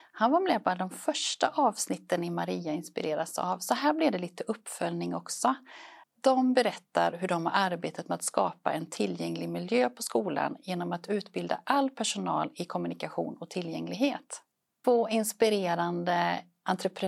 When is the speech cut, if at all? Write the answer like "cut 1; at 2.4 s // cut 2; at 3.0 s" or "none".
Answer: cut 1; at 6.0 s // cut 2; at 14.8 s